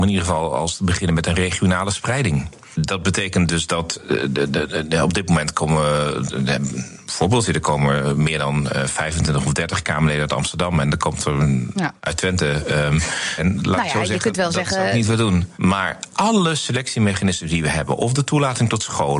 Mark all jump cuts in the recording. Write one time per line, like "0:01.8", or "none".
0:13.4
0:15.5